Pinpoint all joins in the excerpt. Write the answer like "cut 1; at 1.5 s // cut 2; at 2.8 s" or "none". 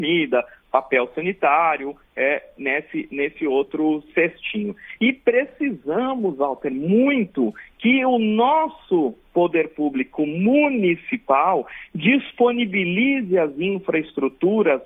none